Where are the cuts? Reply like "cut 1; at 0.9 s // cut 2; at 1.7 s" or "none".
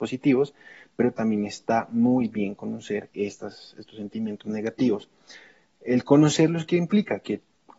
none